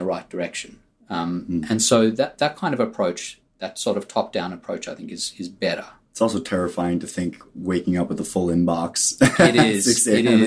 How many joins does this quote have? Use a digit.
0